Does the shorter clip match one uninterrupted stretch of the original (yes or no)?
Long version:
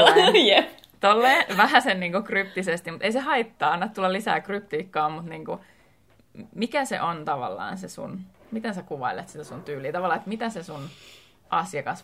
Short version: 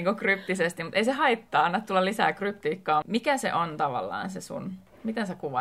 no